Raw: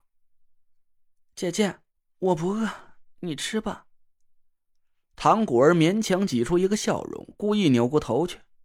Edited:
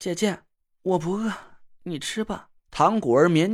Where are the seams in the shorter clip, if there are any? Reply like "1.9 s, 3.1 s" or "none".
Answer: 2.6 s